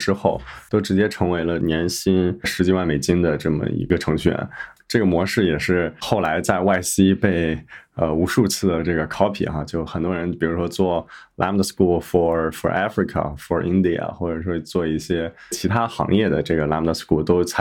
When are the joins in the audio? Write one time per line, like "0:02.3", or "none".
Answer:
none